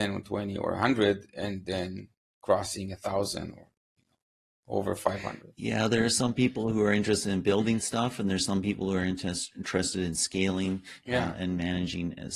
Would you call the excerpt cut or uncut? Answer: uncut